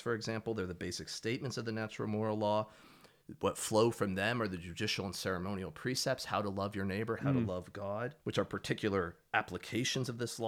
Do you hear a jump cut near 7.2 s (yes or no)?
yes